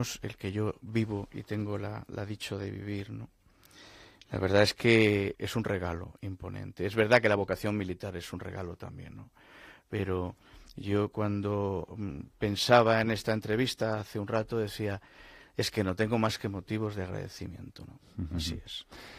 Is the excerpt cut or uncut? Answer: cut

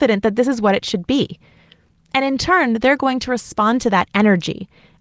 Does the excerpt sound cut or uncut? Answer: uncut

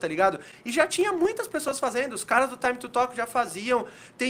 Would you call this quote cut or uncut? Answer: uncut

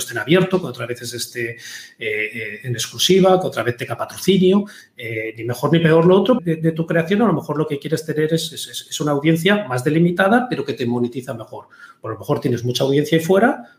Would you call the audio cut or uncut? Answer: cut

